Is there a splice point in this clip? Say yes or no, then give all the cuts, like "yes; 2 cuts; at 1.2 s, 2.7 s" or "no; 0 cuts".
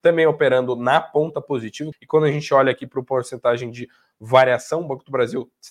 yes; 1 cut; at 1.9 s